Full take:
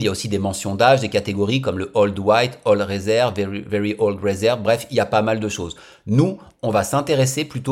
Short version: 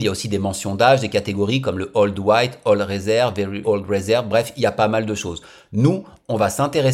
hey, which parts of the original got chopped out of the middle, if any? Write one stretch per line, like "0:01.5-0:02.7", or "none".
0:03.6-0:04.0